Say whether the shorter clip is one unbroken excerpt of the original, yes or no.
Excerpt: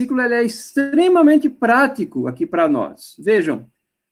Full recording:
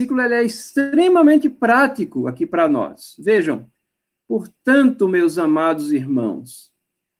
yes